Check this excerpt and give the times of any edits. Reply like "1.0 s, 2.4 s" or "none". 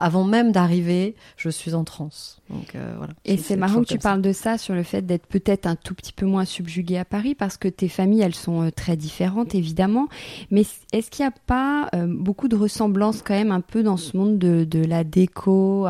none